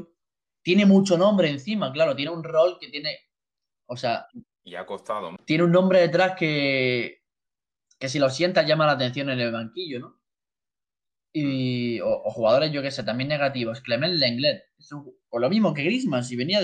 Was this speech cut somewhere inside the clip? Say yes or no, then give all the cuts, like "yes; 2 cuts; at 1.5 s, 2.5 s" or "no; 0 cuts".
yes; 1 cut; at 5.4 s